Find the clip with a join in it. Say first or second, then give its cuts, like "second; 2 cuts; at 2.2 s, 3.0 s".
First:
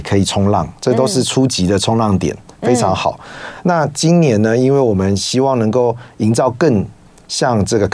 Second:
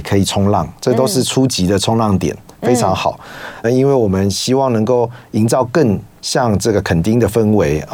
second; 2 cuts; at 3.6 s, 6.2 s